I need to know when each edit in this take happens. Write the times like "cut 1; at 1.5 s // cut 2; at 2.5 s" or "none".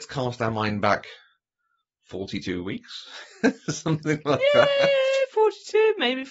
none